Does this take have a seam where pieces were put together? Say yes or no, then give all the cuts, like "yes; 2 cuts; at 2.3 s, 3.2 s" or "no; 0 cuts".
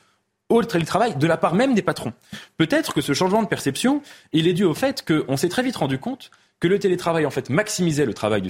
no; 0 cuts